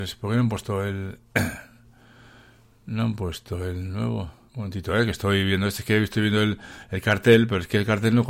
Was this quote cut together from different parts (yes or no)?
yes